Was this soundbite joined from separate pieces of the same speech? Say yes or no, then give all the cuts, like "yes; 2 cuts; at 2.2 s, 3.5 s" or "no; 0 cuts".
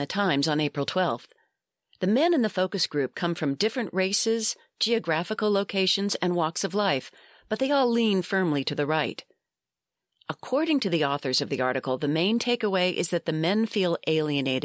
no; 0 cuts